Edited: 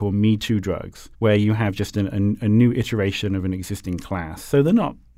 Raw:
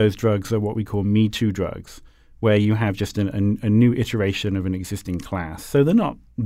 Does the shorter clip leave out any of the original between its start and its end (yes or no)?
yes